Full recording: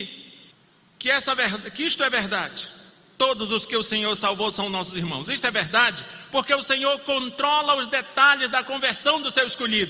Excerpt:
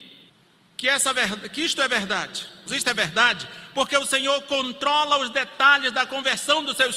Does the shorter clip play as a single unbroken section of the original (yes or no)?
no